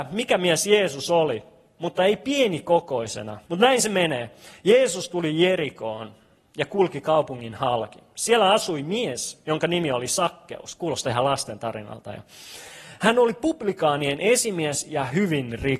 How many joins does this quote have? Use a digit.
1